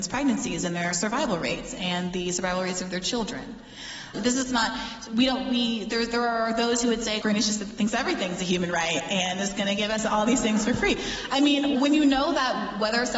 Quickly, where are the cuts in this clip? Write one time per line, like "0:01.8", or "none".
0:04.1
0:07.2
0:11.7